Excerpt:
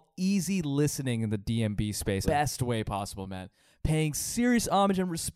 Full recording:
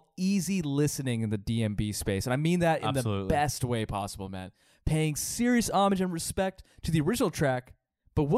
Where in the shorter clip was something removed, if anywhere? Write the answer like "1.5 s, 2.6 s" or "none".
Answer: 2.2 s